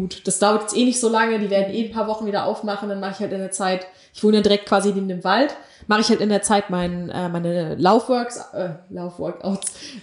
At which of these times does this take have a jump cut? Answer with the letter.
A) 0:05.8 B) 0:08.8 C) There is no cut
C